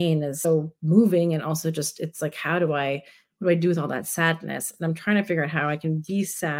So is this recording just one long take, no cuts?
yes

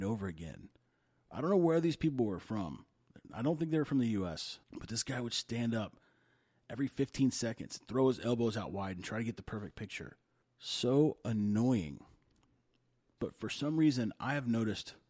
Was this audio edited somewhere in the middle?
yes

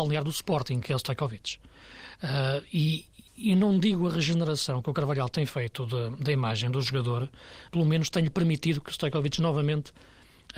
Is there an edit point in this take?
yes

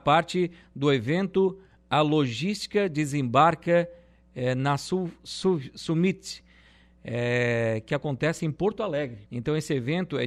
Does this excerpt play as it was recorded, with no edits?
no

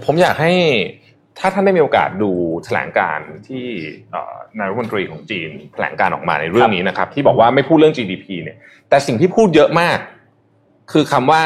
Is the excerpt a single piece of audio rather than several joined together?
yes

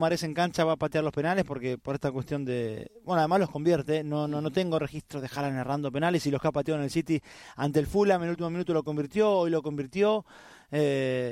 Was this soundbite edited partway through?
no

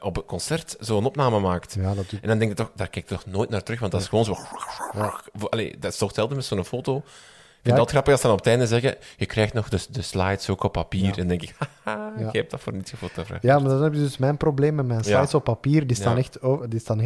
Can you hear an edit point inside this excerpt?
no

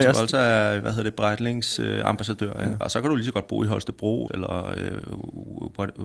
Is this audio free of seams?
no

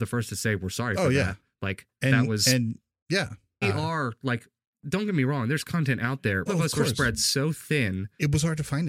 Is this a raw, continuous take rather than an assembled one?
no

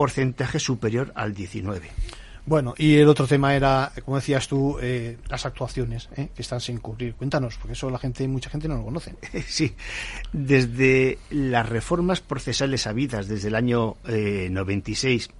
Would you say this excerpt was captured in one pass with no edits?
yes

